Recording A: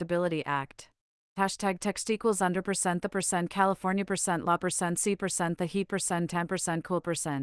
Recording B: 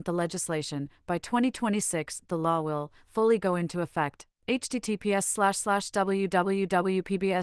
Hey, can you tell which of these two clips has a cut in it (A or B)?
A